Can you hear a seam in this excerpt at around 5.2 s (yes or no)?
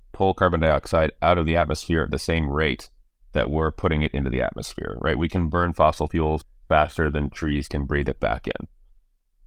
no